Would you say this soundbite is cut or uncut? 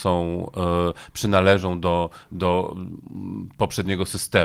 uncut